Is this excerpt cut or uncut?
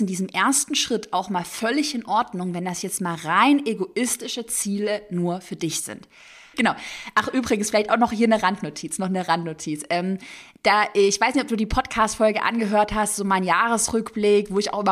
cut